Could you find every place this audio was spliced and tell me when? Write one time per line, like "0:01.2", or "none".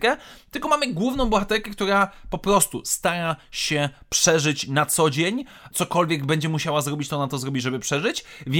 0:05.7